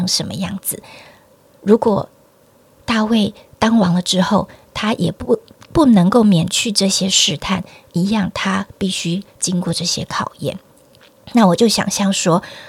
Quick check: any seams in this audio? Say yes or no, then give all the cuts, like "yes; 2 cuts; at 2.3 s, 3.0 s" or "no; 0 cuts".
no; 0 cuts